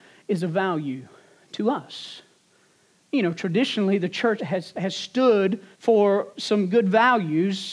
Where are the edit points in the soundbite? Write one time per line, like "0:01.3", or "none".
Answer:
0:04.4
0:05.7